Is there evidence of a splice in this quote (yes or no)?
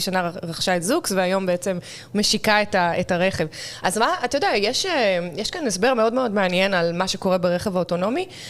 no